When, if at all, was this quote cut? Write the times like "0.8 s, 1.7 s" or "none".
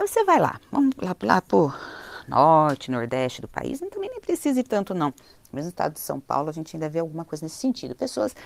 none